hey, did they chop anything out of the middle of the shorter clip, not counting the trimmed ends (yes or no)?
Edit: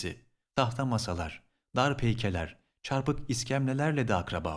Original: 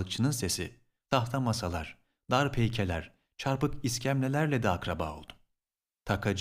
no